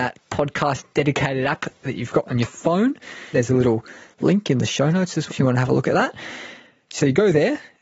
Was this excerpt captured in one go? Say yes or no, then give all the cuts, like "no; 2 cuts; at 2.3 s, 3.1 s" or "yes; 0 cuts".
no; 2 cuts; at 3.3 s, 5.3 s